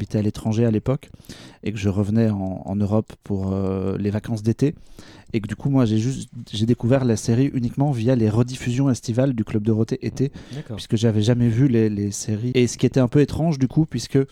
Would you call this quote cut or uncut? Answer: cut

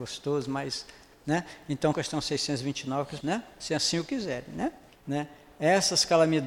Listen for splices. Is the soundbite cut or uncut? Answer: cut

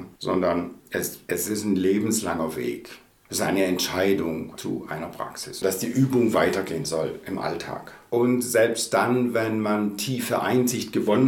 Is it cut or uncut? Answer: cut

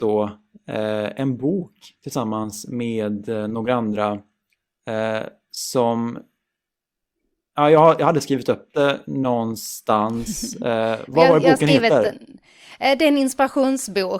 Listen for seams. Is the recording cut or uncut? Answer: uncut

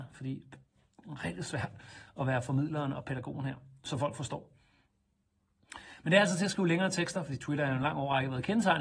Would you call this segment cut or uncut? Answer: uncut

